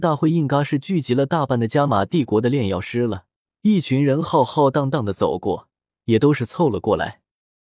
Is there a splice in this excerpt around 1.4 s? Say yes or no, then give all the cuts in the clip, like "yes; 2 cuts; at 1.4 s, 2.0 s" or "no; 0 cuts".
no; 2 cuts; at 3.4 s, 5.9 s